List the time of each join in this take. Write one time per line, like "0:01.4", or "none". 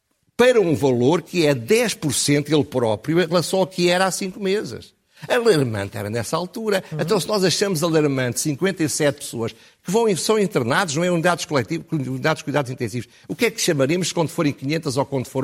none